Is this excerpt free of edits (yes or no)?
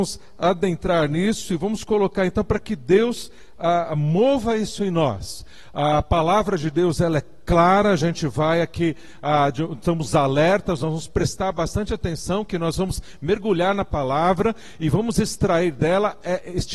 yes